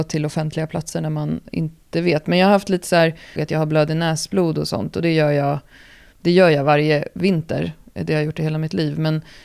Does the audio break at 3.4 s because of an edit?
yes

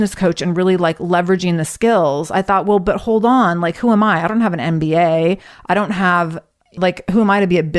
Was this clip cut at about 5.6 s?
no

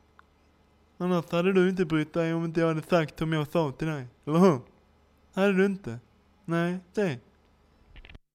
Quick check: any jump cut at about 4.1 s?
no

